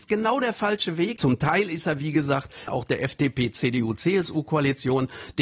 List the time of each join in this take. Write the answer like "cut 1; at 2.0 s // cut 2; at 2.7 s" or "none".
cut 1; at 1.2 s // cut 2; at 2.7 s